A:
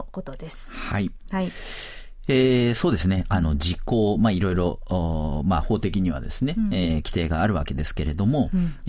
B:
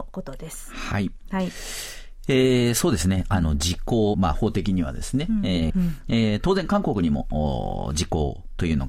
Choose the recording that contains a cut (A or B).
B